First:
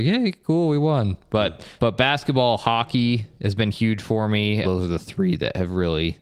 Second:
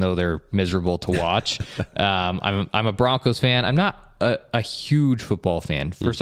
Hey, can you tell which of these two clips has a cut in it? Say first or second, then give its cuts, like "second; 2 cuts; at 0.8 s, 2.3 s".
first; 2 cuts; at 1.8 s, 4.6 s